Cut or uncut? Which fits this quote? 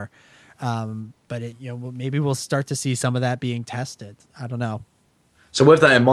cut